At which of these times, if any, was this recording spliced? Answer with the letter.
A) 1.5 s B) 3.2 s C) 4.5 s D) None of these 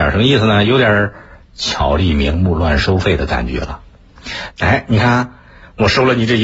C